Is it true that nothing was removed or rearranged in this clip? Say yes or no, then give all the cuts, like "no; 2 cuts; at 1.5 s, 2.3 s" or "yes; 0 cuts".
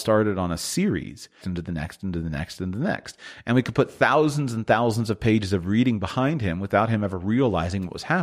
no; 1 cut; at 1.4 s